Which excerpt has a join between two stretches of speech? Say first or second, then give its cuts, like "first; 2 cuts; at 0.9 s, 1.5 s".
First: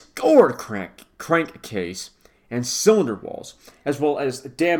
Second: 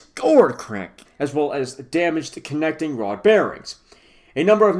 second; 1 cut; at 1.0 s